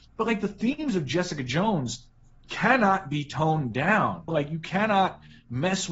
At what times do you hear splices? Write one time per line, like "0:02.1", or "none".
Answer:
0:04.3